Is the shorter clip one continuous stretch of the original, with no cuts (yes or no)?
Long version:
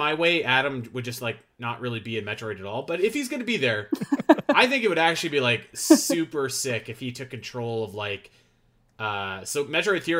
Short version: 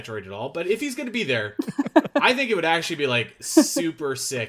yes